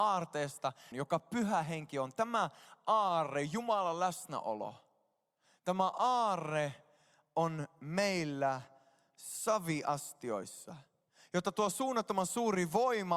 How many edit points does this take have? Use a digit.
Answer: 1